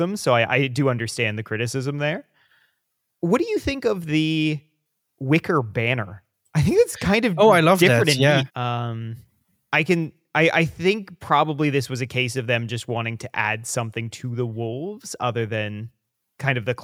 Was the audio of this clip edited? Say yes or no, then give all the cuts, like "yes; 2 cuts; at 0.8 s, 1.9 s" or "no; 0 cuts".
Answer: yes; 1 cut; at 8.5 s